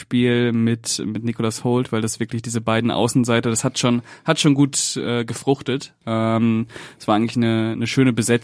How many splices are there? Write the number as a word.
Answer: zero